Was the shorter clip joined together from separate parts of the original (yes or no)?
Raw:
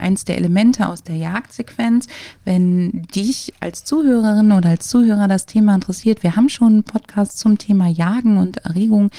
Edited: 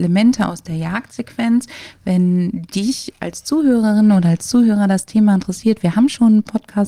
no